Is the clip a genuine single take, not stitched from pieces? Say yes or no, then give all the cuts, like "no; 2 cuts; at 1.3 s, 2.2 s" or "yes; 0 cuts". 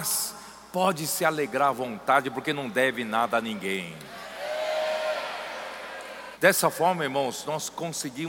no; 1 cut; at 6.3 s